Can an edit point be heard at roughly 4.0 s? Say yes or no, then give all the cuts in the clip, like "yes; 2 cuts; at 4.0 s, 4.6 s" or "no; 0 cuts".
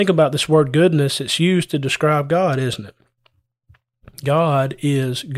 no; 0 cuts